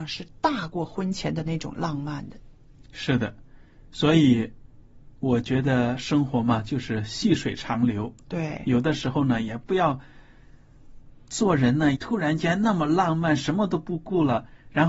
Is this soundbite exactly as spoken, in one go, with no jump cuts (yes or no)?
no